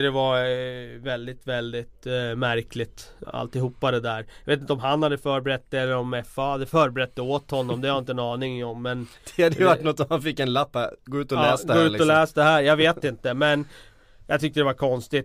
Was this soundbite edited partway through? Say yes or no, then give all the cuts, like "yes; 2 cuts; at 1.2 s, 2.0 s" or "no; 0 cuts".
yes; 1 cut; at 3.2 s